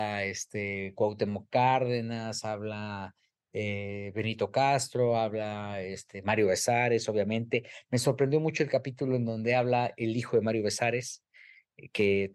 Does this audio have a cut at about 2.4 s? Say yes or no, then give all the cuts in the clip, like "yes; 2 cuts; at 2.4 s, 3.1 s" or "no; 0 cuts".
no; 0 cuts